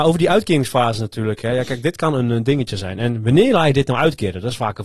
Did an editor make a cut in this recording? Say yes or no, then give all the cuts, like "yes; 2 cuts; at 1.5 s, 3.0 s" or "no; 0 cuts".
no; 0 cuts